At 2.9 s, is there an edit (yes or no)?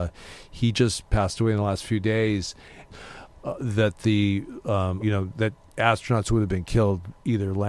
yes